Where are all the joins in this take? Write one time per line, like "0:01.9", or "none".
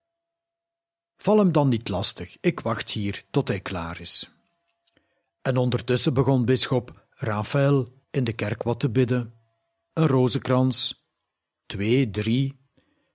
0:08.0

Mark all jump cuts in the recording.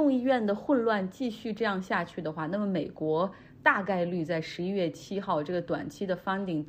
none

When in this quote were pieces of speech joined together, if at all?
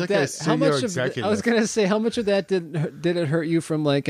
none

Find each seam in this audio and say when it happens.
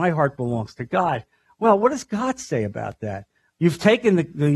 0:03.5

